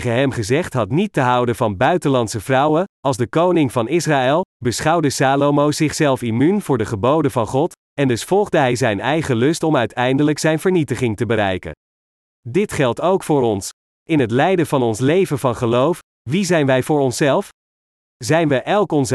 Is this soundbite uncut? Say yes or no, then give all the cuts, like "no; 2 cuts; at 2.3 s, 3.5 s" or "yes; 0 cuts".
yes; 0 cuts